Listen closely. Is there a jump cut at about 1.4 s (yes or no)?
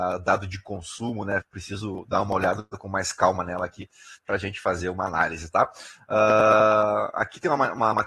yes